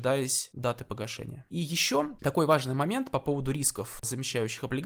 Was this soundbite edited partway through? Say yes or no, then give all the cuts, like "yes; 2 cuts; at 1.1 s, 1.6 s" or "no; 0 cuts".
no; 0 cuts